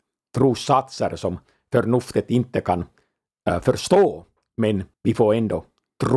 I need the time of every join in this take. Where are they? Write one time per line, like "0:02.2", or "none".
0:04.9